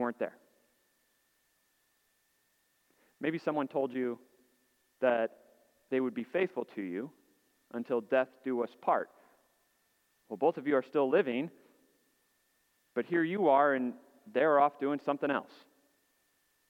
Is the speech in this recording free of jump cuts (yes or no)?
yes